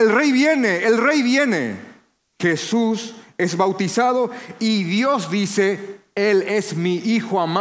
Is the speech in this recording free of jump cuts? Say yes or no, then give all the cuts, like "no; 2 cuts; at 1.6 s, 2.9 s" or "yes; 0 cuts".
no; 1 cut; at 2.3 s